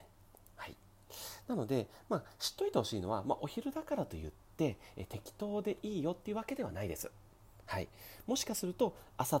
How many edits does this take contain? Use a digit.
0